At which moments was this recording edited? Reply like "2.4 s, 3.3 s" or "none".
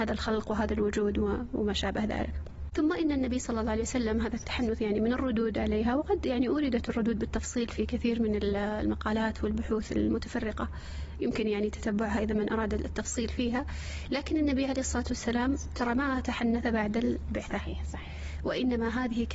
none